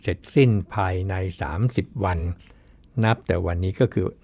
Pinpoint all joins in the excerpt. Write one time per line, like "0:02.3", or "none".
none